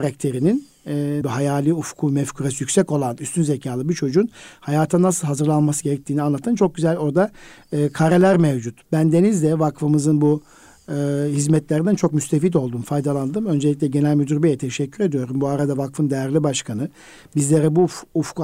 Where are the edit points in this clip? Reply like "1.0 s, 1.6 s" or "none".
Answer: 1.2 s, 8.9 s